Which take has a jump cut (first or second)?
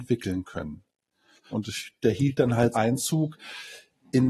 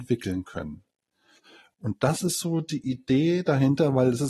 first